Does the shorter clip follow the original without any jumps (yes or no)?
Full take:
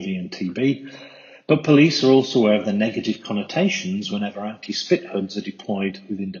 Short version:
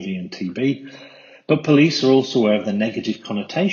yes